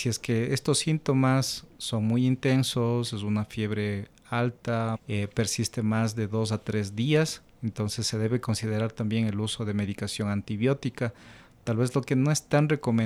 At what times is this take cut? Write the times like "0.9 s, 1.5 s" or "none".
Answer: 4.9 s